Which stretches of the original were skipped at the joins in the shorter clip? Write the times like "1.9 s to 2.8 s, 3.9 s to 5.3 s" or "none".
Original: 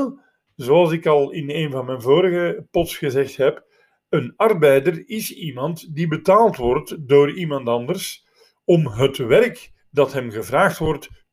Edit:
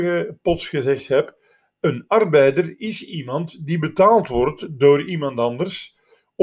none